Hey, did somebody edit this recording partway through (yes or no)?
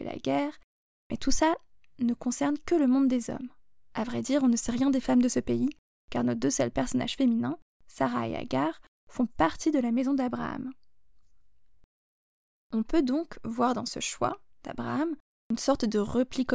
no